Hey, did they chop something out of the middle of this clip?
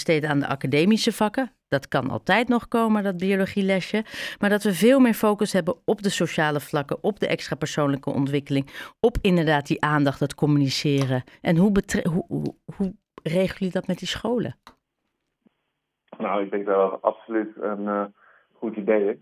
no; 0 cuts

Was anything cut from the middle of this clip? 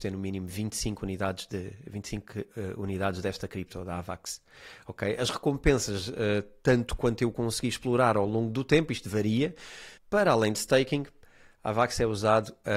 yes; 1 cut; at 10.0 s

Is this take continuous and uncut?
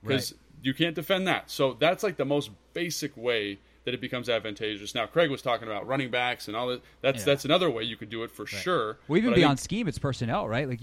yes; 0 cuts

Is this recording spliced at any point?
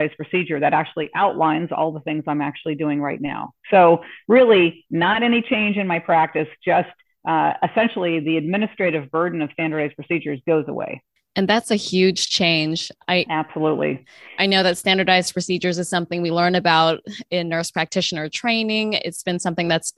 no; 0 cuts

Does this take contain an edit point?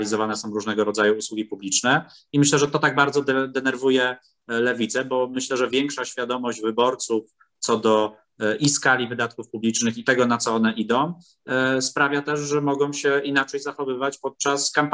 no; 0 cuts

